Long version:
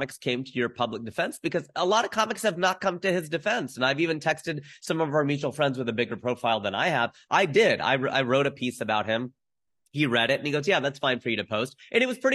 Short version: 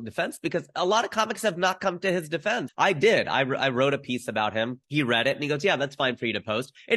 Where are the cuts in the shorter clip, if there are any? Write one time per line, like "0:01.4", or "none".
0:02.7
0:04.8